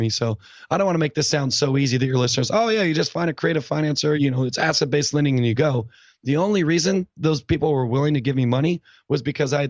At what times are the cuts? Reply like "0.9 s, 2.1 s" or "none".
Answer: 4.2 s